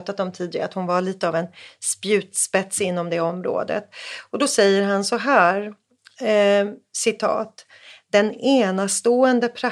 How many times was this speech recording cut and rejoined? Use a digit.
0